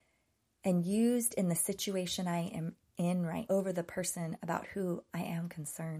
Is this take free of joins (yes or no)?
no